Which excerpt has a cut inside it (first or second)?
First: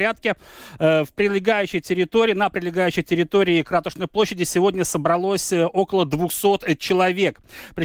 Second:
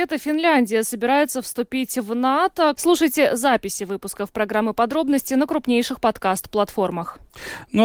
second